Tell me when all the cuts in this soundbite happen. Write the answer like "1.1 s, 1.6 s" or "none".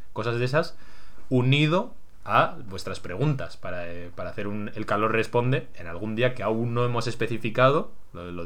none